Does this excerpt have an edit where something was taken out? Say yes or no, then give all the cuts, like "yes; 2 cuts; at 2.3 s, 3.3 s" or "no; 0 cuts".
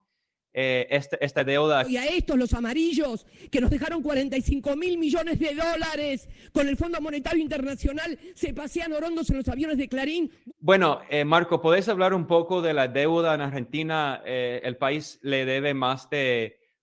no; 0 cuts